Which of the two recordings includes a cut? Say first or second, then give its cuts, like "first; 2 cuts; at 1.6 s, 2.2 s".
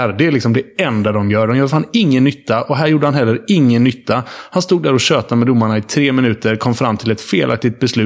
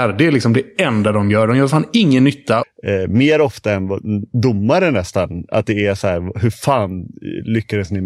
second; 1 cut; at 2.6 s